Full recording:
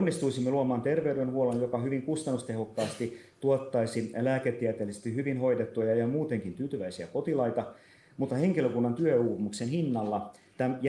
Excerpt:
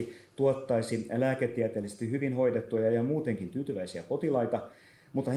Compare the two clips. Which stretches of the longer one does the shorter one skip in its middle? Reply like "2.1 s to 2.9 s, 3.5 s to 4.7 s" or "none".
none